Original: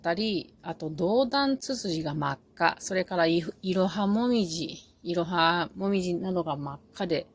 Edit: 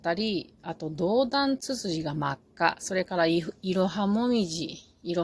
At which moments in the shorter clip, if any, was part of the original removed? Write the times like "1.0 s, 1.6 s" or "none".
none